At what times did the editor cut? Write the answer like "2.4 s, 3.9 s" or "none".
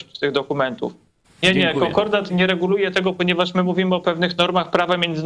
1.2 s, 2.3 s